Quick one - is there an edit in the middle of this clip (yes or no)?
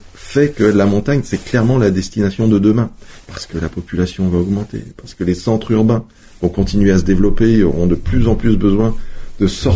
yes